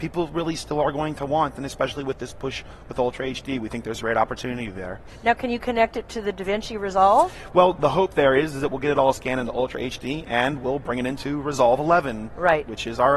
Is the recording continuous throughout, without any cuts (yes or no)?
no